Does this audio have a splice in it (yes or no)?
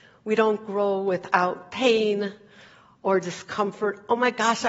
no